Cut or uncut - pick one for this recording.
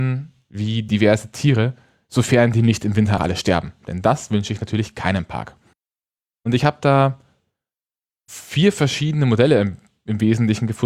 cut